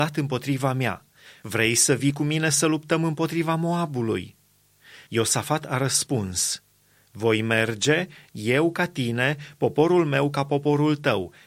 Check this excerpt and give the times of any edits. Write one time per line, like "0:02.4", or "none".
none

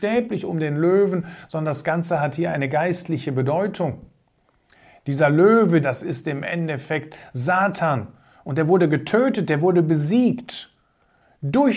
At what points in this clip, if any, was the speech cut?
0:05.8

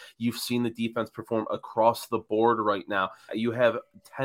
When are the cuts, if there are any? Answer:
0:03.3

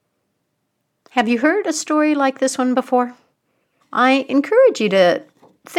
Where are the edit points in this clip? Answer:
0:03.8

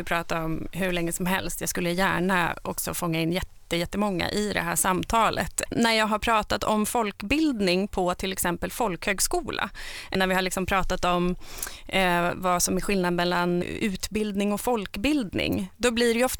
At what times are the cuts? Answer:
0:05.7
0:13.6

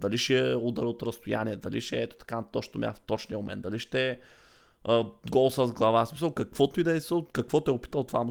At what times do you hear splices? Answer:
none

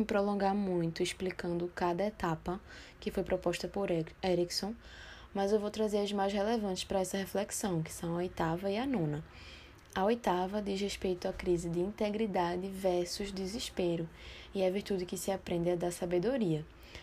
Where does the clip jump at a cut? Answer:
none

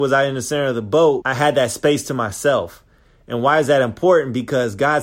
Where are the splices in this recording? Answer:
0:01.2

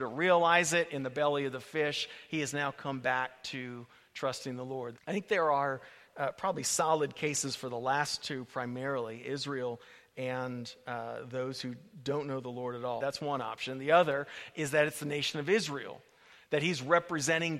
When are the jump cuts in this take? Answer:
0:04.9
0:13.0

